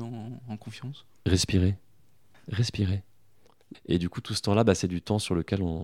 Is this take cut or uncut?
cut